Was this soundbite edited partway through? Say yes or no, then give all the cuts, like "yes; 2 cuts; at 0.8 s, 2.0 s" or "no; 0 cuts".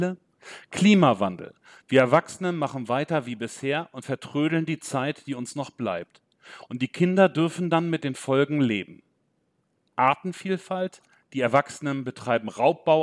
no; 0 cuts